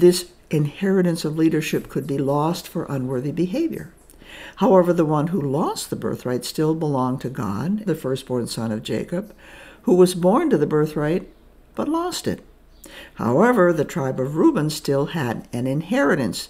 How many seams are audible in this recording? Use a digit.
1